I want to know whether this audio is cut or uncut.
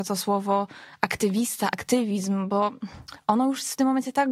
uncut